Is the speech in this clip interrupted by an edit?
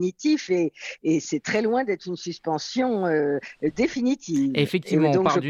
no; 0 cuts

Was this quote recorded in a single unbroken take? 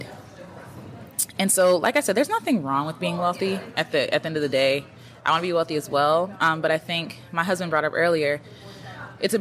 yes; 0 cuts

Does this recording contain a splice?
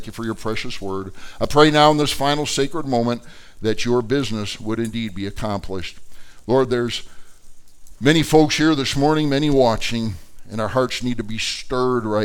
no; 0 cuts

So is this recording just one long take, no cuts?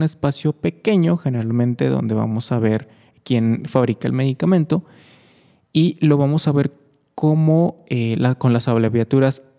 yes; 0 cuts

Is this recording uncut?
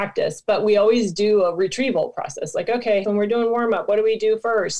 no; 1 cut; at 3.0 s

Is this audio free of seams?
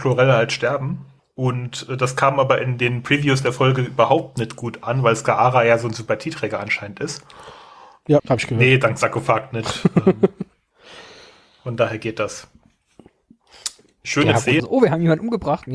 no; 3 cuts; at 1.2 s, 8.2 s, 14.6 s

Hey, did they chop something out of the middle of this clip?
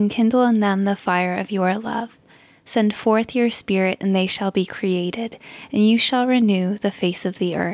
no; 0 cuts

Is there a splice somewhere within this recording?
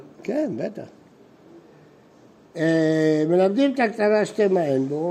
no; 0 cuts

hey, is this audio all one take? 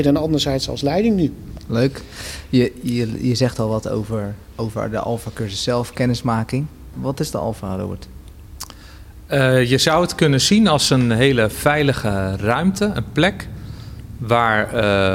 no; 1 cut; at 6.9 s

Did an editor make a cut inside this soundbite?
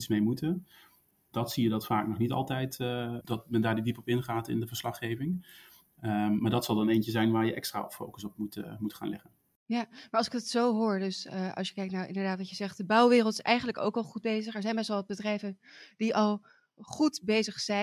no; 0 cuts

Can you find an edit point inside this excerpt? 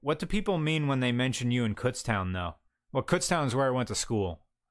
no; 0 cuts

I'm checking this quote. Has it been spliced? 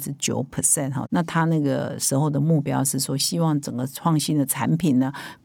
no; 0 cuts

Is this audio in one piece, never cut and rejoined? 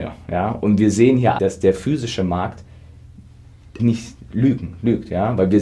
no; 2 cuts; at 1.4 s, 3.8 s

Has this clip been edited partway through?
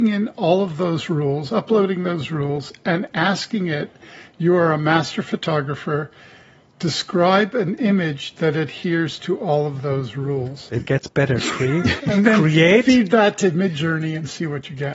yes; 2 cuts; at 10.7 s, 12.0 s

